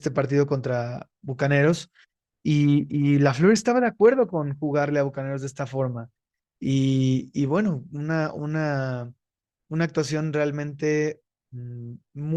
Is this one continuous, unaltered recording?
yes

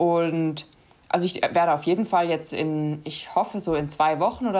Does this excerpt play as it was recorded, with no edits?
yes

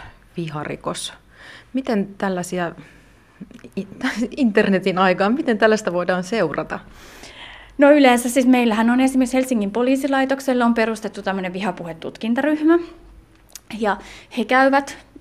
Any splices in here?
no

